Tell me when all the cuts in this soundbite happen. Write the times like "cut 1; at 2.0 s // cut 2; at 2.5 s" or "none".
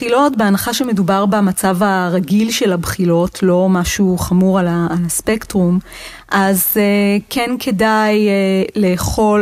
none